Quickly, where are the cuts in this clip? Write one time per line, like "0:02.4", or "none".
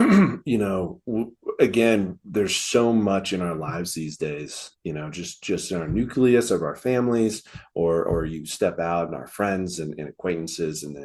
none